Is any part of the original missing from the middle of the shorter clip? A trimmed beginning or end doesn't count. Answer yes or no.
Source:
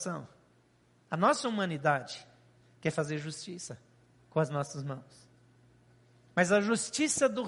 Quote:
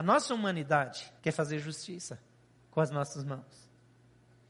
yes